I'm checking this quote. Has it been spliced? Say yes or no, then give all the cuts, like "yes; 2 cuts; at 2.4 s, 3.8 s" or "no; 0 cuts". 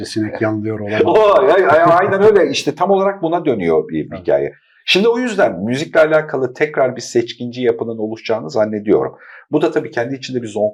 no; 0 cuts